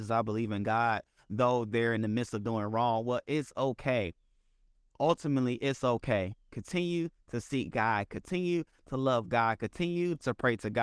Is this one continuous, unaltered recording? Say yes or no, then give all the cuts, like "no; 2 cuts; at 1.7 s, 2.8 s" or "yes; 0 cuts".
yes; 0 cuts